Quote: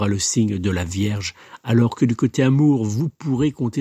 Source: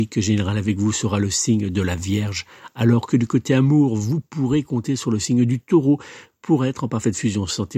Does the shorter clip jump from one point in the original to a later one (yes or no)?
no